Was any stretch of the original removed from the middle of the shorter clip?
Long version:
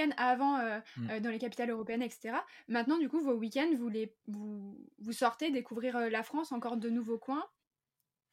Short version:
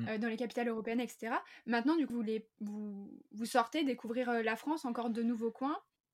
yes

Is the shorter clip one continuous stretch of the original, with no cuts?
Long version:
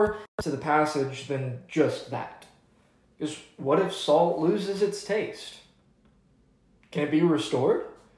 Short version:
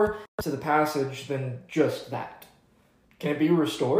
no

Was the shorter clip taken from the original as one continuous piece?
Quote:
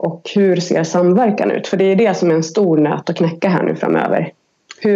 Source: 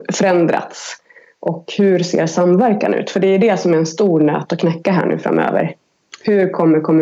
yes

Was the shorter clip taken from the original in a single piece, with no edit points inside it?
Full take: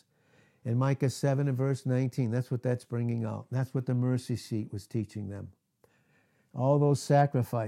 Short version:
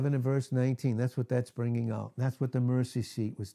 yes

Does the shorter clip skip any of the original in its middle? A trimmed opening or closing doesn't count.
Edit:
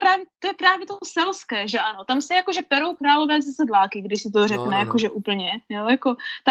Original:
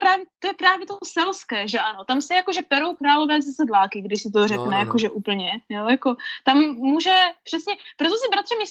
no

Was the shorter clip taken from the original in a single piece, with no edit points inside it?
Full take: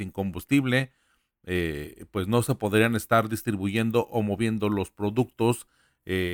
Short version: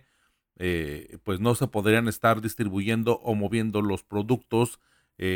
yes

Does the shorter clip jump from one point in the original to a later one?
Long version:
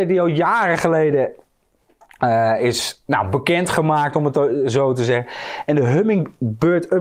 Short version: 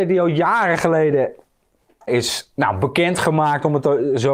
yes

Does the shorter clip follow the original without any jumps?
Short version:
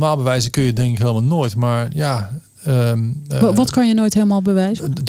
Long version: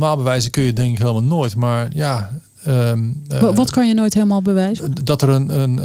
yes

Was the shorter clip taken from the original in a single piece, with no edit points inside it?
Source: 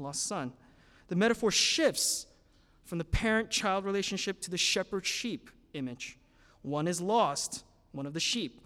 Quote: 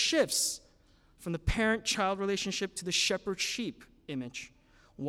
yes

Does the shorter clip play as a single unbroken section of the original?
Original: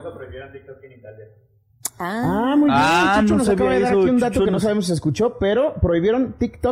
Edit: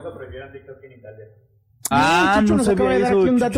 no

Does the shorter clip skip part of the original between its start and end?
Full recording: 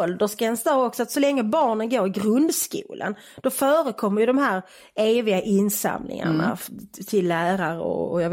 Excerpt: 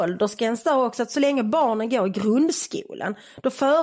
no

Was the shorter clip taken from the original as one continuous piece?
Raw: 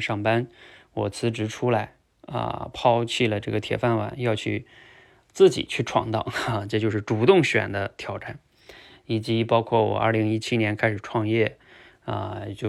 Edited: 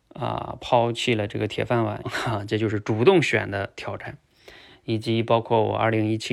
no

